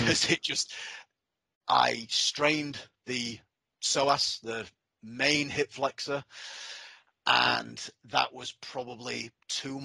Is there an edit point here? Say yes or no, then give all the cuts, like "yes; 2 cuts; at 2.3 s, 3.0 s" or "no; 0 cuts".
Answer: no; 0 cuts